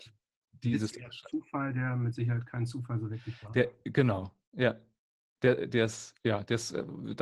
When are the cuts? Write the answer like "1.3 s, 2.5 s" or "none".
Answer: none

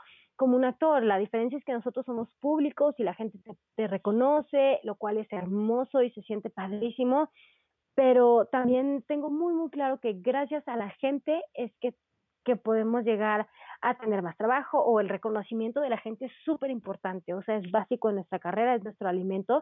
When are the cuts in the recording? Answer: none

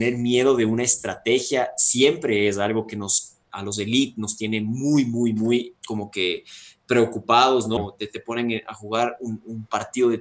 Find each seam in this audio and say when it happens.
5.8 s, 7.8 s

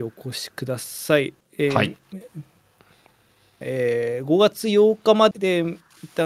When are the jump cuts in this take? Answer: 3.6 s, 5.3 s

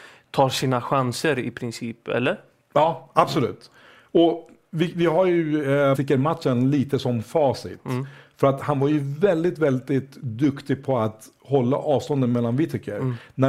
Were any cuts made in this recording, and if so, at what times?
5.9 s

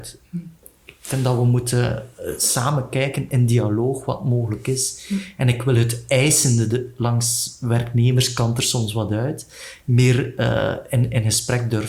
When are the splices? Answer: none

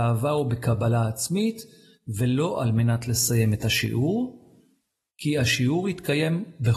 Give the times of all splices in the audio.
none

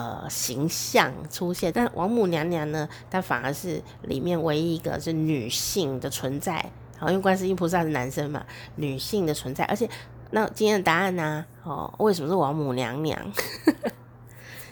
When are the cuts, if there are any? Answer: 1.7 s, 10.3 s

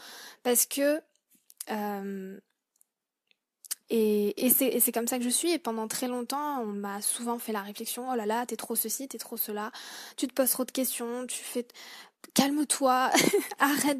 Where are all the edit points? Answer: 3.8 s

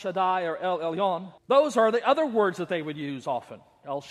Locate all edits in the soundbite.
1.4 s

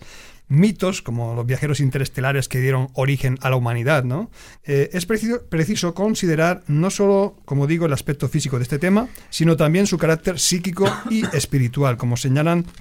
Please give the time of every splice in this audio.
4.6 s

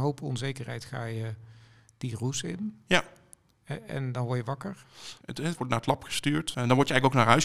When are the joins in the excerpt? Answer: 5.2 s

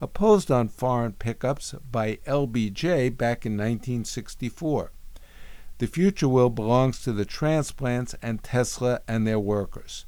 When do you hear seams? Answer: none

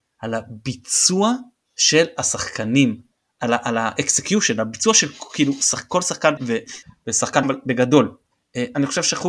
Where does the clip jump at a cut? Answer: 6.4 s, 7.4 s

